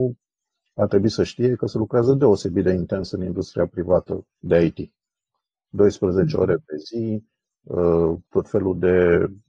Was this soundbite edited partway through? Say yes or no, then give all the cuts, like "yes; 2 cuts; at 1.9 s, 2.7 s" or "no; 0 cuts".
yes; 2 cuts; at 4.4 s, 8.2 s